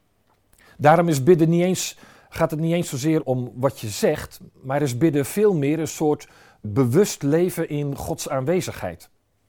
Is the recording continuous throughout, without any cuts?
no; 2 cuts; at 3.2 s, 6.6 s

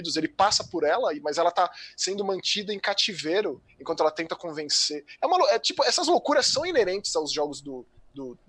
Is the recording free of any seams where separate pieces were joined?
yes; 0 cuts

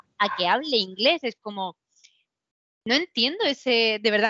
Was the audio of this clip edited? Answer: no; 0 cuts

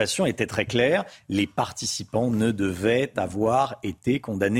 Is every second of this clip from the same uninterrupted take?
yes; 0 cuts

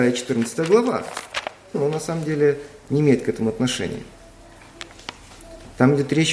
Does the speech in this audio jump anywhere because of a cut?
yes; 1 cut; at 1.7 s

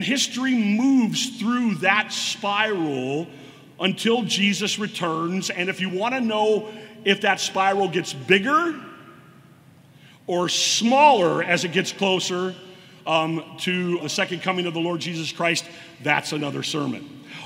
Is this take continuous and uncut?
no; 1 cut; at 14.0 s

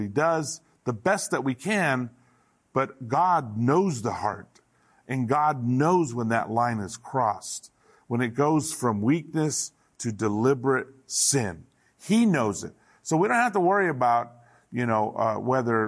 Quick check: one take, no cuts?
yes; 0 cuts

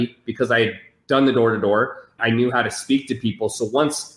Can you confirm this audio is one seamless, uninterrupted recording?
no; 1 cut; at 2.2 s

